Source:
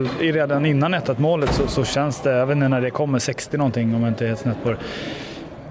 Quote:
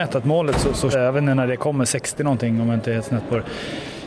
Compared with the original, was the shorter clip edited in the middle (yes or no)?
yes